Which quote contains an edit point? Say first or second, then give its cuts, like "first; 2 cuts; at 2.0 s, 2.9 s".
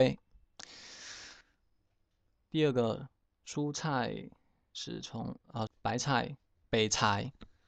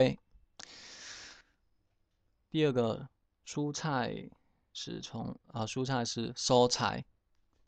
first; 1 cut; at 5.7 s